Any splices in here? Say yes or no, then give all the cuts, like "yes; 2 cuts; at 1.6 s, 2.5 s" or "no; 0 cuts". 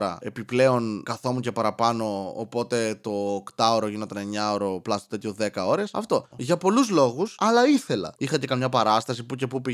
yes; 2 cuts; at 6.3 s, 8.2 s